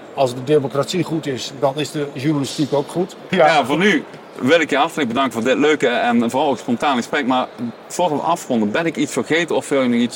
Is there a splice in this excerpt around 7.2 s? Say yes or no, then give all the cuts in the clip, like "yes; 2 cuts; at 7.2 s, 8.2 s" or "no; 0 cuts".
no; 1 cut; at 3.3 s